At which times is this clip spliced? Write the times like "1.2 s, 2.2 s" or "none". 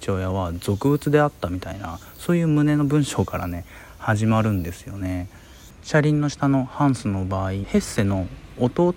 7.6 s